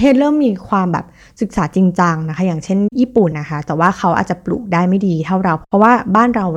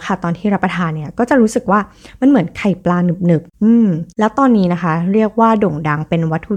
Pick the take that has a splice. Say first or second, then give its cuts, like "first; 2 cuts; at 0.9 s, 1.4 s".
first; 1 cut; at 3.3 s